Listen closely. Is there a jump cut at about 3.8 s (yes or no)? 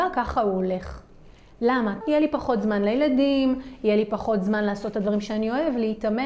no